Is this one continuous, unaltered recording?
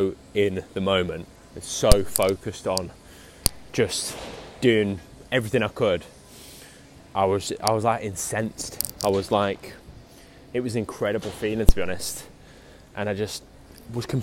yes; 0 cuts

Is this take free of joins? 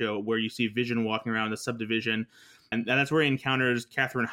no; 1 cut; at 2.7 s

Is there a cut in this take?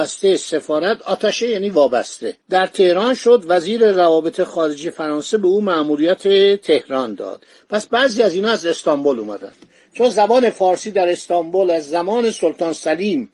yes; 1 cut; at 2.4 s

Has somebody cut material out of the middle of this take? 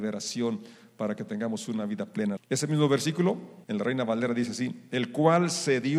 yes; 2 cuts; at 2.4 s, 3.6 s

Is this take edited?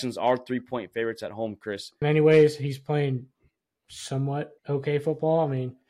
yes; 2 cuts; at 2.0 s, 4.6 s

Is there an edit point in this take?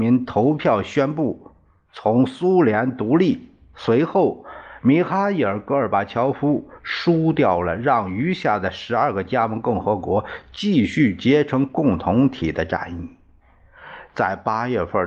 no; 0 cuts

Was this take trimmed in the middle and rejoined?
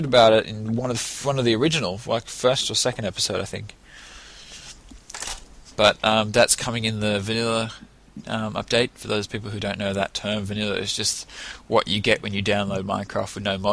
no; 0 cuts

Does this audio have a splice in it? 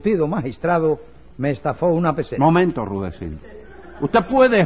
no; 0 cuts

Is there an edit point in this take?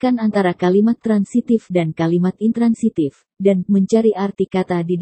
yes; 1 cut; at 3.3 s

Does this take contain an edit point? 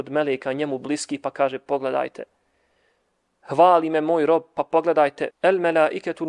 yes; 1 cut; at 5.3 s

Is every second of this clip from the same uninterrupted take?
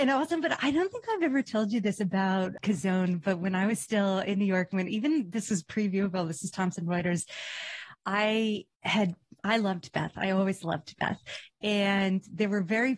no; 1 cut; at 8.7 s

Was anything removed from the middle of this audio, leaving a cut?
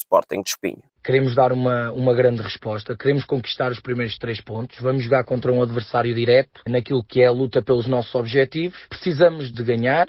no; 0 cuts

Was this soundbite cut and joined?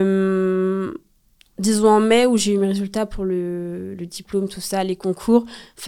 no; 0 cuts

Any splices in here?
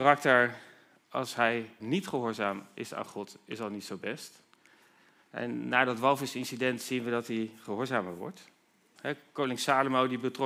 yes; 2 cuts; at 1.8 s, 9.0 s

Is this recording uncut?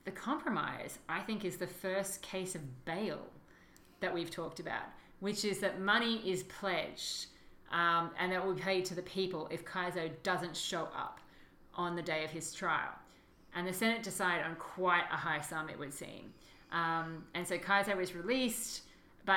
yes; 0 cuts

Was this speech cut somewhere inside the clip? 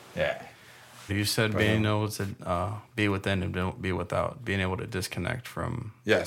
yes; 1 cut; at 1.1 s

